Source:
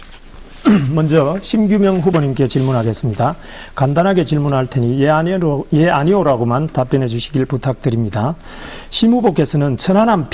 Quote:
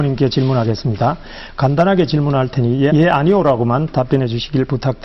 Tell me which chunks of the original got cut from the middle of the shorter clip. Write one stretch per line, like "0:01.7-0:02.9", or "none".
0:05.1-0:05.7